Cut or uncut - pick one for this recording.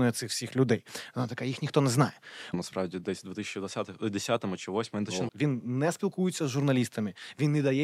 cut